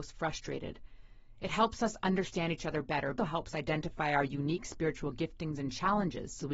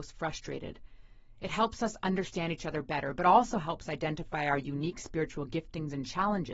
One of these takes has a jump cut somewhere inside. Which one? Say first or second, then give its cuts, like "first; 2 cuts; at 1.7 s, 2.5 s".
first; 1 cut; at 3.2 s